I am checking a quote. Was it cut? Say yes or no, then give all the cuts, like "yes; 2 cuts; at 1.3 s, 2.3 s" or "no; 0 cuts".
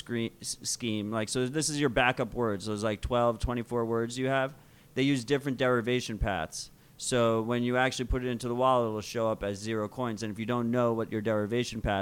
no; 0 cuts